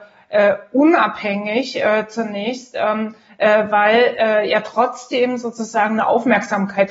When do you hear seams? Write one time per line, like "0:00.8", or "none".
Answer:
none